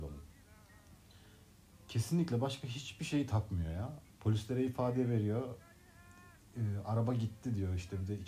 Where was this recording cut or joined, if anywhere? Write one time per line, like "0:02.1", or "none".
0:04.1